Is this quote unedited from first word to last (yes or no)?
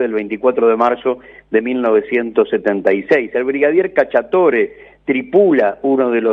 yes